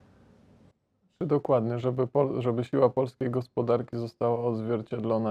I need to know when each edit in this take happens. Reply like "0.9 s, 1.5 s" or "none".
none